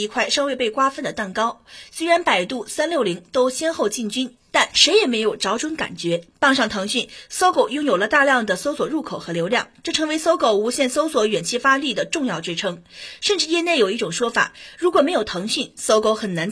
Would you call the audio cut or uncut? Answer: uncut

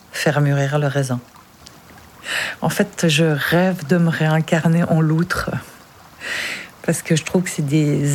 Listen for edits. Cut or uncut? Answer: cut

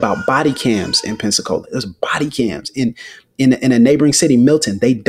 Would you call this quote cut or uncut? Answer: uncut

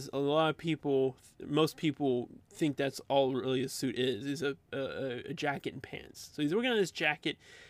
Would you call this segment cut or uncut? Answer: uncut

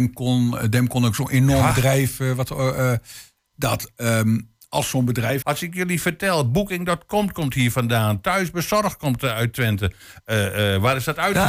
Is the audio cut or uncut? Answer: cut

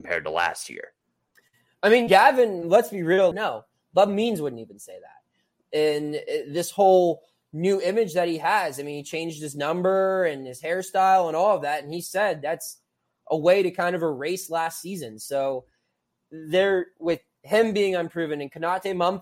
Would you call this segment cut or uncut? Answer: cut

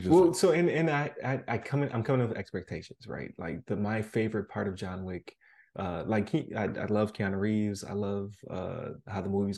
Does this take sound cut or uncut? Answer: uncut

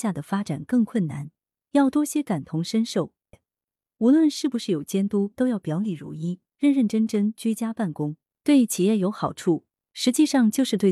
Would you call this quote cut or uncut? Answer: cut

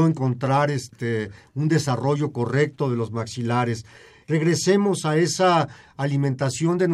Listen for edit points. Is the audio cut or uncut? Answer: cut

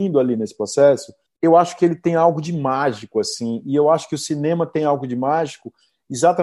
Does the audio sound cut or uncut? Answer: uncut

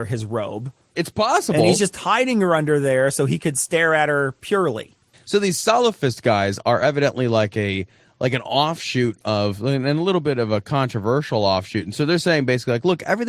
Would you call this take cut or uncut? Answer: cut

